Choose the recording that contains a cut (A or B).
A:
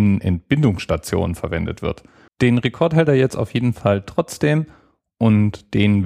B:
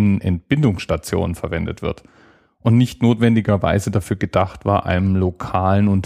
A